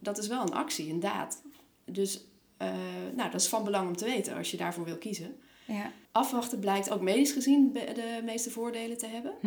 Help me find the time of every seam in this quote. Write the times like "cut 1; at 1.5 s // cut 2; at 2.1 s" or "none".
cut 1; at 6.1 s